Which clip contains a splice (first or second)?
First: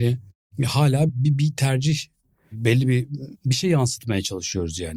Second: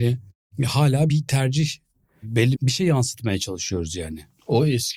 second